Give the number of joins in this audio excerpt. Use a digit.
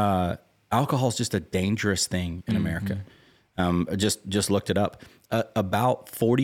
0